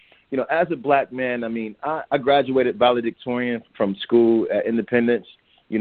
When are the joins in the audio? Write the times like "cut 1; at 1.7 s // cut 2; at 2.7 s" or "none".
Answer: cut 1; at 2.1 s // cut 2; at 3.7 s